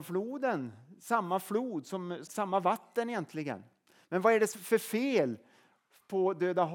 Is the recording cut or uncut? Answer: cut